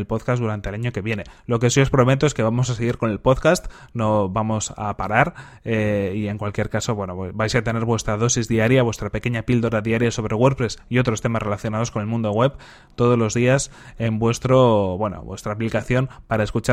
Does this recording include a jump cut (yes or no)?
no